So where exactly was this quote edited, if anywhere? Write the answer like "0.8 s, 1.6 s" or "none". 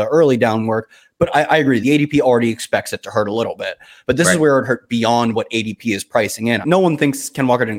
1.8 s, 6.6 s